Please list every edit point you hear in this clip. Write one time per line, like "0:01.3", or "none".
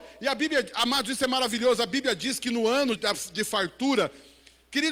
0:02.9